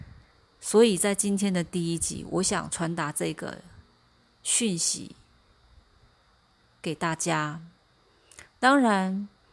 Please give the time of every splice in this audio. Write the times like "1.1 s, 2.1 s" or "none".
none